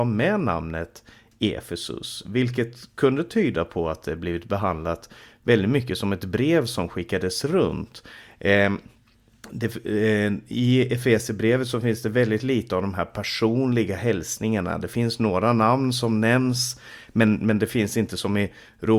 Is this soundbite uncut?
yes; 0 cuts

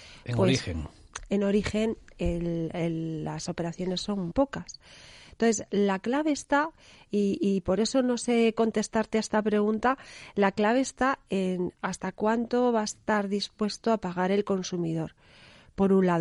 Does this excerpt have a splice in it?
yes; 2 cuts; at 2.1 s, 4.3 s

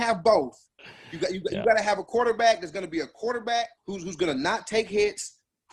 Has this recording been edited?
yes; 1 cut; at 3.8 s

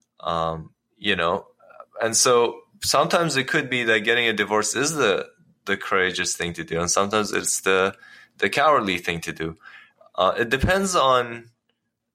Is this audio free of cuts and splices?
yes; 0 cuts

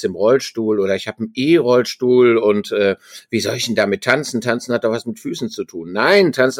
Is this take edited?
no; 0 cuts

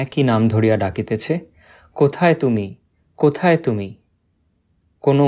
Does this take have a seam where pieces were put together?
no; 0 cuts

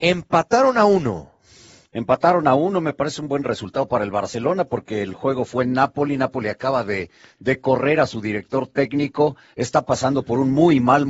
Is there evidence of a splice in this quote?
no; 0 cuts

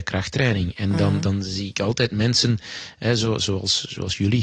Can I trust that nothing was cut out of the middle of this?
yes; 0 cuts

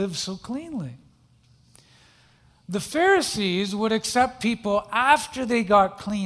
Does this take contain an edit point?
no; 0 cuts

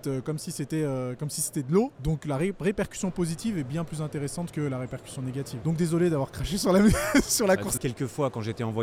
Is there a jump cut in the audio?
yes; 3 cuts; at 1.9 s, 5.6 s, 7.8 s

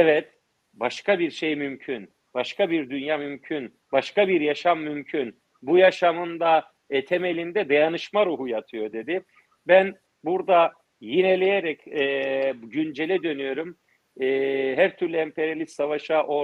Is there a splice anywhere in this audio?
no; 0 cuts

